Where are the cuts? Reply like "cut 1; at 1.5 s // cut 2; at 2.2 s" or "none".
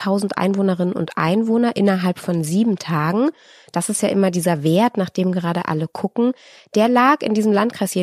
none